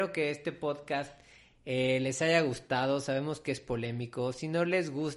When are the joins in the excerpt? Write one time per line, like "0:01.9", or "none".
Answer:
none